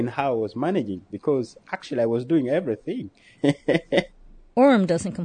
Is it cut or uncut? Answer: uncut